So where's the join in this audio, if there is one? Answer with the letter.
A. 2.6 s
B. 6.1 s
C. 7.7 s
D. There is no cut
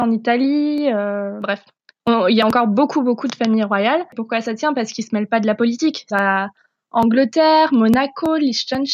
B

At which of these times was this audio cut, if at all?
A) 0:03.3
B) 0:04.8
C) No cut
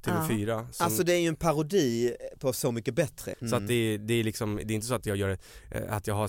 A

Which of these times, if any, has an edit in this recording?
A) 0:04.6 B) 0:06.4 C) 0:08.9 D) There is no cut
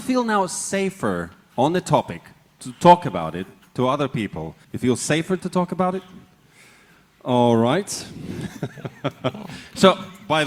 A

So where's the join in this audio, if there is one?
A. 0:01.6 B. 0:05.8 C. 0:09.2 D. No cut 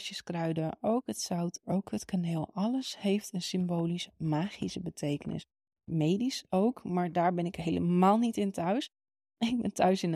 A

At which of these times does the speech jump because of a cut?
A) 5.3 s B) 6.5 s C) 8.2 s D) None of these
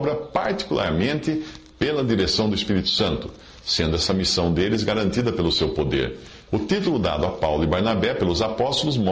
B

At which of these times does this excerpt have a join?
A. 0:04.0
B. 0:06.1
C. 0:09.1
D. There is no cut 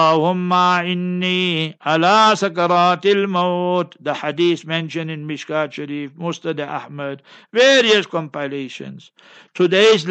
D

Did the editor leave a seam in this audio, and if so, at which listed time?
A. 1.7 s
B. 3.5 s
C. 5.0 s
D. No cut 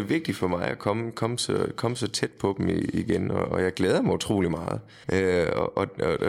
C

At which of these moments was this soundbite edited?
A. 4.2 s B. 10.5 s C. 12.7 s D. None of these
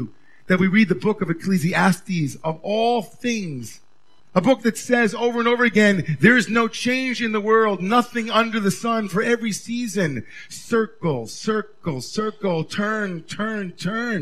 A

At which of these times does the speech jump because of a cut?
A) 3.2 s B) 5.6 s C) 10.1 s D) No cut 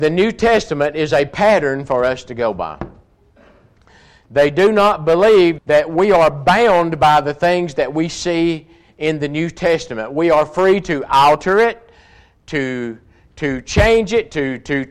B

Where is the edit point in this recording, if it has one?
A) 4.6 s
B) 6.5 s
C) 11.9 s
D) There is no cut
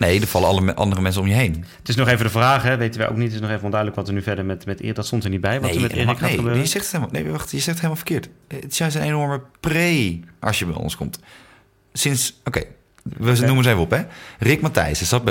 D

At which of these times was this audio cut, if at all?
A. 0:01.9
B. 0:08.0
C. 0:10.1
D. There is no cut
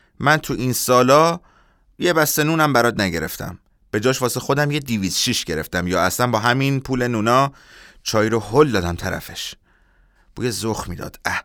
D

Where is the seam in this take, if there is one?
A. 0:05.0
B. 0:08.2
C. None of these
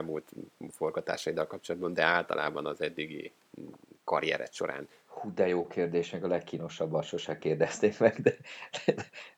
A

